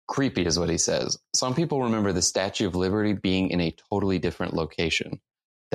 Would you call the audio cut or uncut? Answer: uncut